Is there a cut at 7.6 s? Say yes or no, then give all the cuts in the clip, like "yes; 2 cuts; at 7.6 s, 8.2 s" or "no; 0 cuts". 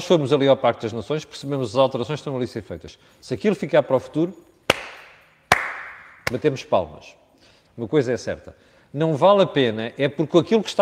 yes; 1 cut; at 7.6 s